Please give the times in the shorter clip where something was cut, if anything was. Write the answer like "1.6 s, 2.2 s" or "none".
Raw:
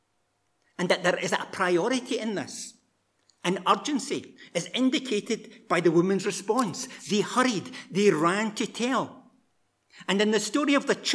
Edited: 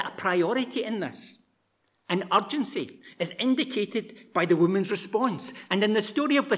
5.7 s